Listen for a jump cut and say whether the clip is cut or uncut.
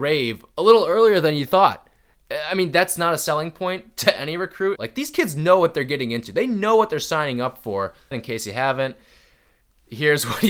cut